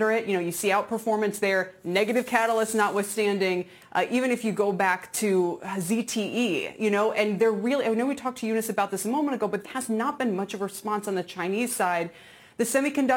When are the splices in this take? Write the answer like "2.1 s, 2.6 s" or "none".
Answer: 3.8 s, 9.6 s